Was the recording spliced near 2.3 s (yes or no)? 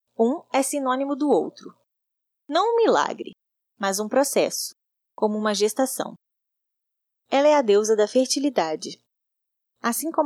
yes